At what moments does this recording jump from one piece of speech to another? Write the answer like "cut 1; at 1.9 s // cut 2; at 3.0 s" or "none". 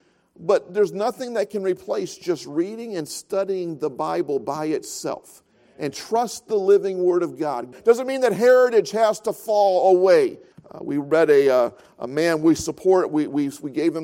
cut 1; at 7.7 s // cut 2; at 10.5 s